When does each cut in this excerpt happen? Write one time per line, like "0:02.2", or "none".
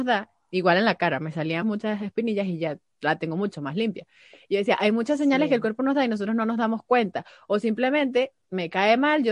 0:01.6

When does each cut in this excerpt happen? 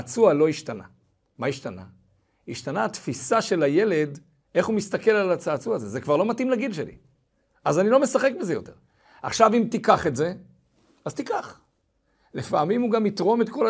none

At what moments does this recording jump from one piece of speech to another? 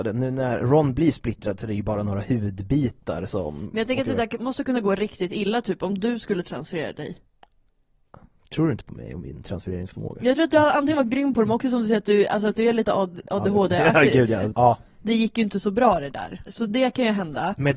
0:14.5
0:16.5

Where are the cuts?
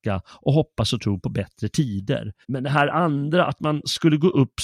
0:02.4

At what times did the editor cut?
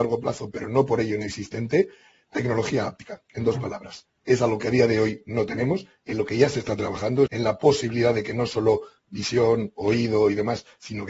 0:07.3

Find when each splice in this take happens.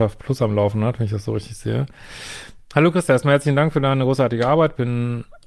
none

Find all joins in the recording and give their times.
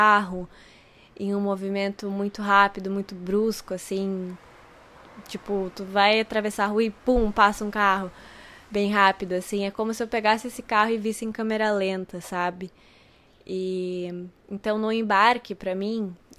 none

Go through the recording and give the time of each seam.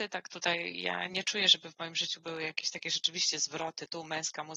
0:01.1

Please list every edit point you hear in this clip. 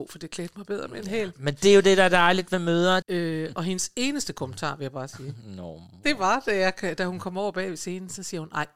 0:03.0

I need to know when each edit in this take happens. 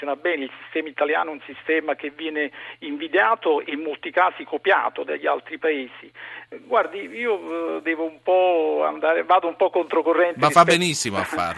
0:06.5

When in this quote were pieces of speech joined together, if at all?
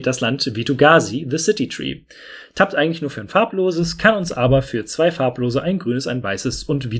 none

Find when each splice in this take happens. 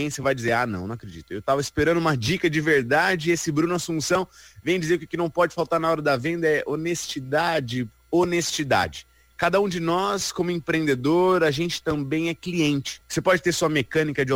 0:07.9
0:13.0

